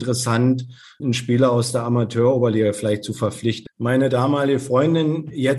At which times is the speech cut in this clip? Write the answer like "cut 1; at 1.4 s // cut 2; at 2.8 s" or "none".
cut 1; at 1.0 s // cut 2; at 3.7 s